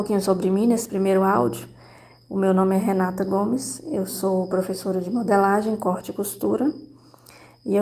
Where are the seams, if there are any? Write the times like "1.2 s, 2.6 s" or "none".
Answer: none